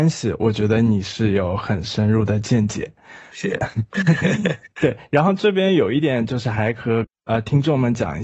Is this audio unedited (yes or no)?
no